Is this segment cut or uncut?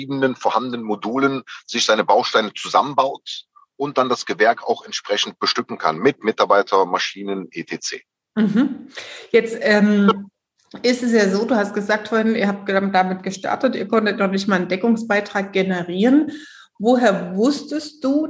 uncut